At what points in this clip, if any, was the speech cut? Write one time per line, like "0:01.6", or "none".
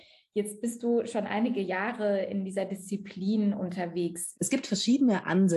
0:04.3